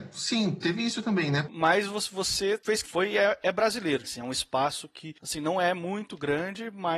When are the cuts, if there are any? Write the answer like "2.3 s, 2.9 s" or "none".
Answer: 1.4 s, 2.8 s, 4.0 s